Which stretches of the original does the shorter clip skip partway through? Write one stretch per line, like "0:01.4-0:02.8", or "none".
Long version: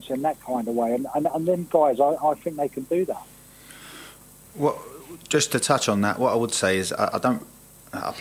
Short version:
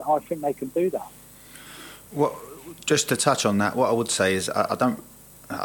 0:04.2-0:04.5